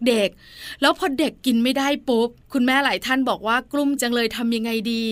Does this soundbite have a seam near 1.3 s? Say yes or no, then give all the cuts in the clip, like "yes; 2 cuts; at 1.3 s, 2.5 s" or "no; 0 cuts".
no; 1 cut; at 4.0 s